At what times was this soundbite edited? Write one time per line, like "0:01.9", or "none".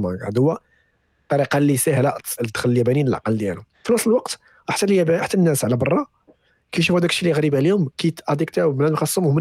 0:02.4
0:03.7